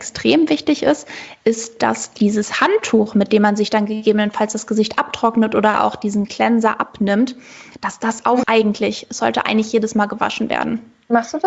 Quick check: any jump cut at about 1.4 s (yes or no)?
no